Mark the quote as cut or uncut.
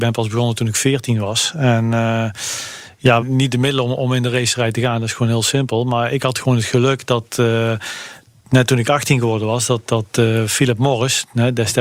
cut